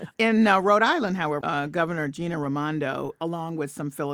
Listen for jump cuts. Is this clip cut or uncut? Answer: cut